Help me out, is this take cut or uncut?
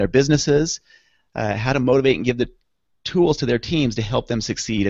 uncut